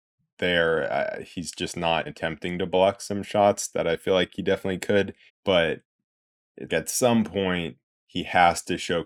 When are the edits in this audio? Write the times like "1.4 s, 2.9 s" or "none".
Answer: 2.1 s, 5.3 s, 6.7 s